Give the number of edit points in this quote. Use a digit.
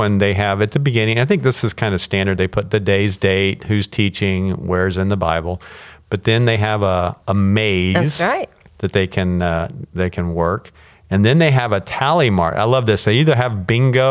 0